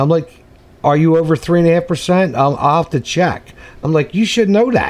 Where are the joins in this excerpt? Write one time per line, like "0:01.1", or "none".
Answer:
none